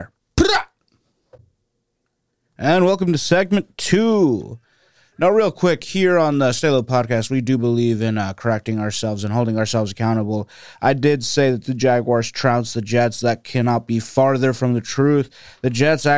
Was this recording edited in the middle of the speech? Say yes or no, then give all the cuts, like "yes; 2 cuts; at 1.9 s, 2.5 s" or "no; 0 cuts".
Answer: no; 0 cuts